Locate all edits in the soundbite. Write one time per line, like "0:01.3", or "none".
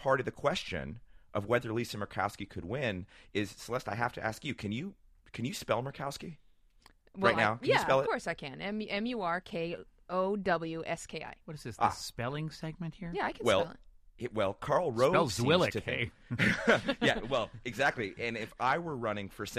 none

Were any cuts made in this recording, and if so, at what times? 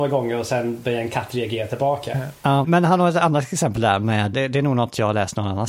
0:02.6
0:04.3

